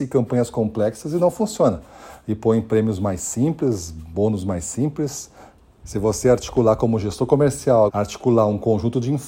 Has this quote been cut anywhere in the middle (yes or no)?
yes